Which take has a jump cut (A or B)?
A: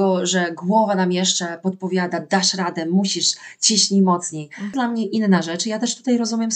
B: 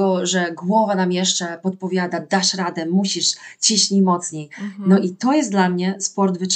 A